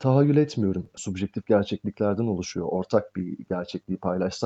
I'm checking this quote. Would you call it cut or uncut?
cut